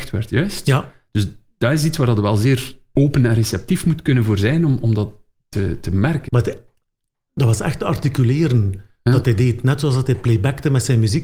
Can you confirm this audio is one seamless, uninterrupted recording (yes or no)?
no